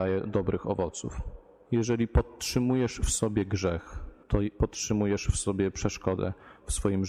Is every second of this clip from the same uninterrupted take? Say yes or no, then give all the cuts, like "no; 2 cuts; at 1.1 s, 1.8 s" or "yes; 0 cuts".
no; 2 cuts; at 1.7 s, 4.2 s